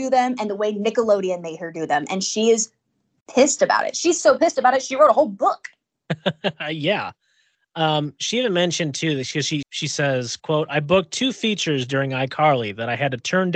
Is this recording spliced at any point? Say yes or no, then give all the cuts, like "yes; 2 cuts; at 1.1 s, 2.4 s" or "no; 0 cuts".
yes; 1 cut; at 9.6 s